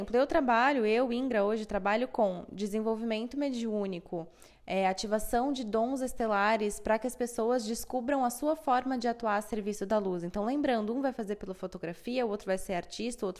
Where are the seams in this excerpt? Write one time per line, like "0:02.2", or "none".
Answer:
none